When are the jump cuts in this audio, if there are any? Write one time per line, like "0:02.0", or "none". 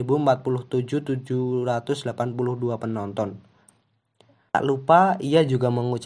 0:04.5